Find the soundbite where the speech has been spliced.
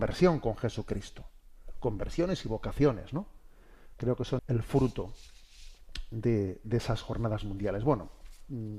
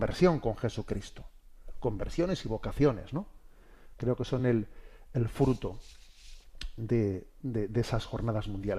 first; 2 cuts; at 4.4 s, 6.6 s

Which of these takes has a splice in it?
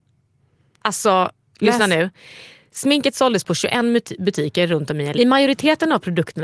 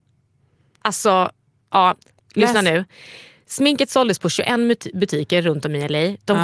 first; 2 cuts; at 1.5 s, 5.2 s

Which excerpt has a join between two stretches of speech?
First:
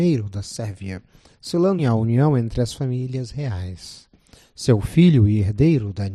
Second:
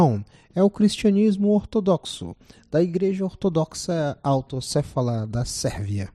first; 1 cut; at 1.8 s

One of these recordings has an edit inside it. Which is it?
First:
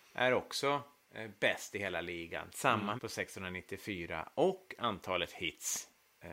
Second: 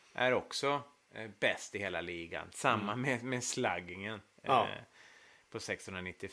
first; 1 cut; at 3.0 s

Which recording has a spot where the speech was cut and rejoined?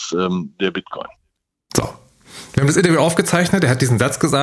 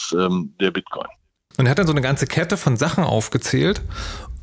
second; 1 cut; at 1.5 s

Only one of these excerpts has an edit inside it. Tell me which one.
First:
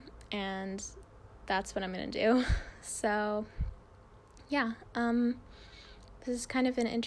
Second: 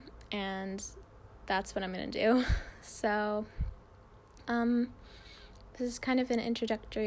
second; 1 cut; at 4.5 s

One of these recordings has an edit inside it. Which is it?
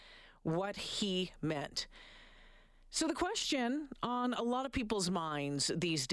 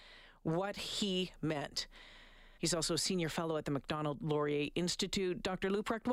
second; 1 cut; at 2.6 s

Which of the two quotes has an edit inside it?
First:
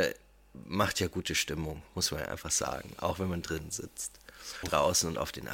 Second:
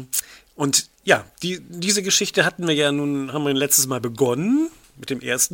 first; 1 cut; at 4.6 s

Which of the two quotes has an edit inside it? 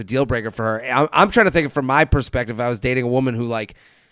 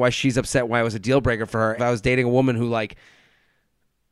second; 1 cut; at 1.8 s

